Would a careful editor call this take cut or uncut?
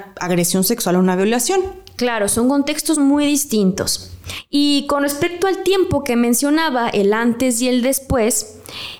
uncut